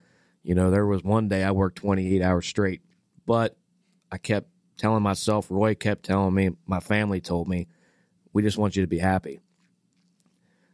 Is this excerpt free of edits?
no; 1 cut; at 3.1 s

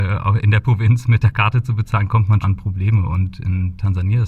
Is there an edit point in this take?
yes; 1 cut; at 2.4 s

